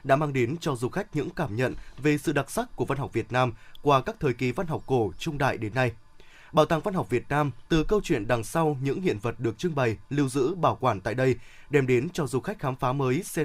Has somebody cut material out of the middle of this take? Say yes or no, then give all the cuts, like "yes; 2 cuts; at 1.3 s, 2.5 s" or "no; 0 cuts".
yes; 1 cut; at 7.7 s